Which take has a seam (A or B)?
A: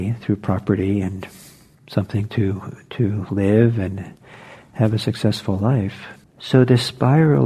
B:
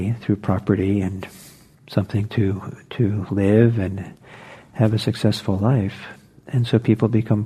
A